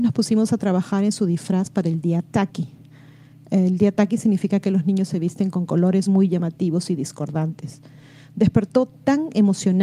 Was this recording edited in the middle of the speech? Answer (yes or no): no